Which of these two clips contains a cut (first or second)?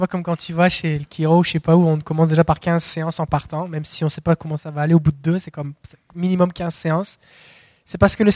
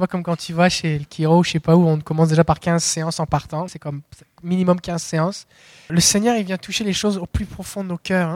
second